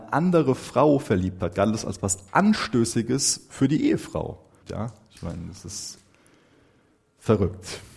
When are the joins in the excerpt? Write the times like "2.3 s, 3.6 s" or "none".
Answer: 4.6 s